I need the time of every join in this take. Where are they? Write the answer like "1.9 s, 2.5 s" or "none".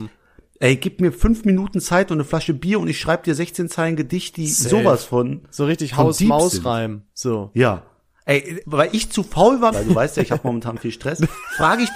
8.6 s, 9.7 s